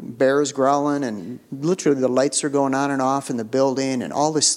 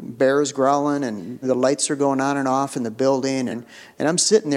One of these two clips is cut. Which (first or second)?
second